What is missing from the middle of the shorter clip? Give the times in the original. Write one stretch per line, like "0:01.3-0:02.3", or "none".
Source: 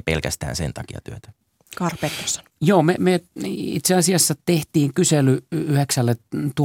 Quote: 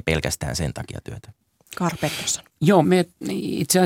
0:02.8-0:03.0